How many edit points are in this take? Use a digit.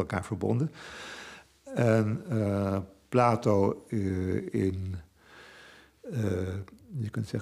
0